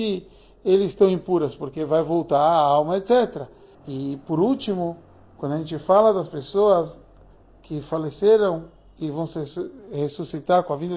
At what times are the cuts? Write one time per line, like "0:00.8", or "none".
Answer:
0:03.7